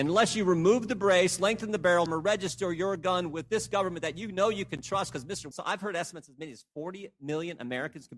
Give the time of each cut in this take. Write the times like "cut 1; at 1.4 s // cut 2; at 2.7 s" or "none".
cut 1; at 2.1 s // cut 2; at 5.5 s

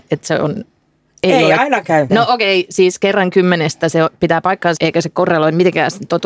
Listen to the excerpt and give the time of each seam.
cut 1; at 2.1 s // cut 2; at 4.8 s

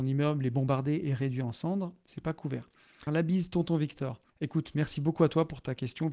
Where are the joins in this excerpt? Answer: cut 1; at 3.1 s // cut 2; at 4.3 s

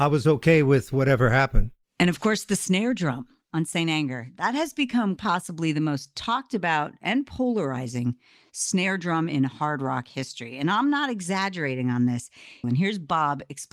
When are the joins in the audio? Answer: cut 1; at 5.2 s // cut 2; at 12.6 s

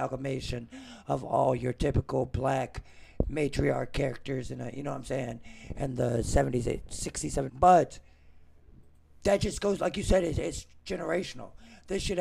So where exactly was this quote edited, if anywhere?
cut 1; at 7.5 s

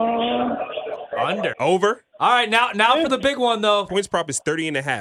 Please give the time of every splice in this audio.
cut 1; at 1.5 s // cut 2; at 3.9 s

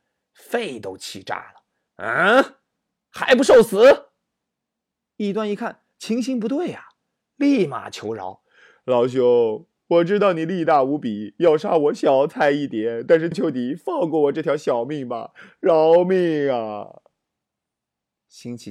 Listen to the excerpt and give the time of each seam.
cut 1; at 13.3 s

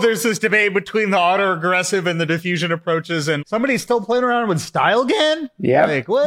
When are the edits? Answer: cut 1; at 3.4 s

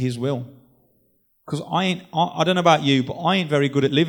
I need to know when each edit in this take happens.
none

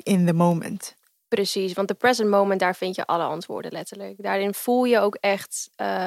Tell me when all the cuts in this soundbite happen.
none

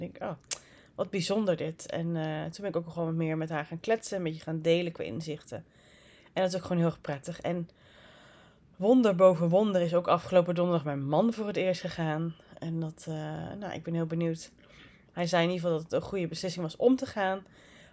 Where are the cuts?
none

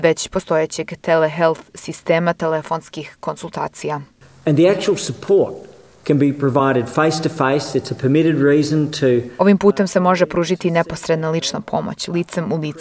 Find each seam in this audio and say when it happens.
none

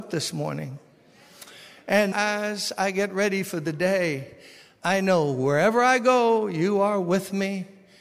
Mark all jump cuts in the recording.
cut 1; at 2.1 s

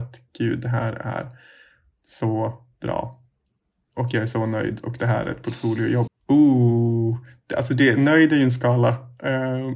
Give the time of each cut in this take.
cut 1; at 6.1 s

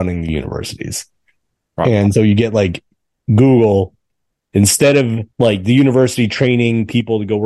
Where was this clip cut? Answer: cut 1; at 2.1 s // cut 2; at 5.3 s

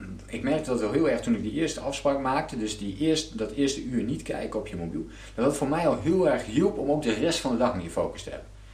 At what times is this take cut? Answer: none

